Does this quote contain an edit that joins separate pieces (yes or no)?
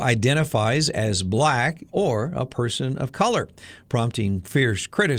yes